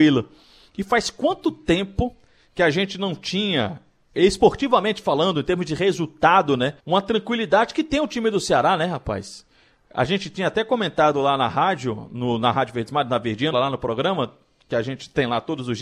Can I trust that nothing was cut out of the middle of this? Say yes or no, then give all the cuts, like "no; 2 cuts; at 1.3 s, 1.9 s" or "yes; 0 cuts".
no; 2 cuts; at 6.8 s, 13.5 s